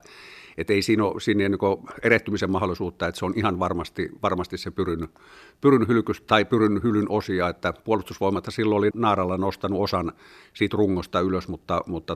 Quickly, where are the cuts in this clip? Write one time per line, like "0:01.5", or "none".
0:08.9